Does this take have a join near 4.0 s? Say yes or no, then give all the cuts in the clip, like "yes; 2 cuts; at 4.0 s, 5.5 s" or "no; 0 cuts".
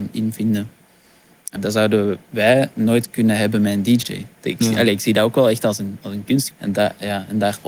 yes; 3 cuts; at 1.6 s, 4.0 s, 6.5 s